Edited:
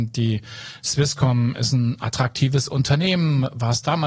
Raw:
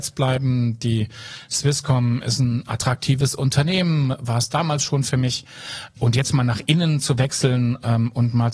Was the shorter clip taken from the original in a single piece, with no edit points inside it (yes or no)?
yes